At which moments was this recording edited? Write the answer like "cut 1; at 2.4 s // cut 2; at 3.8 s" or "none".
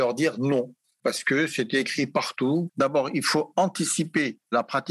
cut 1; at 2.7 s

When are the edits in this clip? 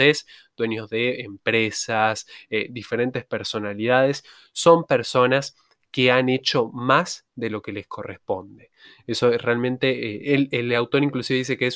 none

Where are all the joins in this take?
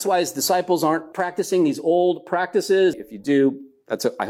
cut 1; at 1.1 s // cut 2; at 2.9 s

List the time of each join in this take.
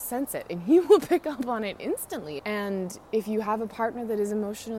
cut 1; at 2.4 s

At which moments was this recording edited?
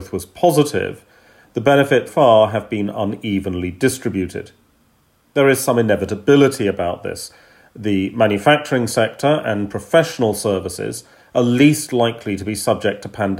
cut 1; at 2.1 s

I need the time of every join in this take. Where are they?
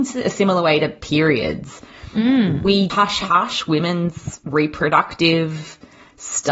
cut 1; at 2.9 s // cut 2; at 4.4 s

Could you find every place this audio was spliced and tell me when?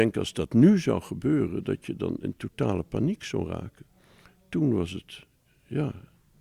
none

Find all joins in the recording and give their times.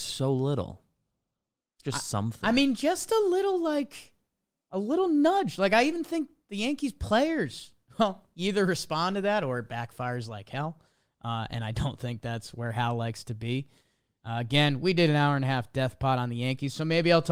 none

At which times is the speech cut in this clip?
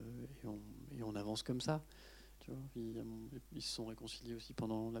cut 1; at 2.4 s

